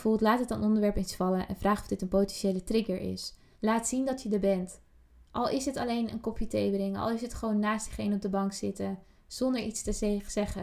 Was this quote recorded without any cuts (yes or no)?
no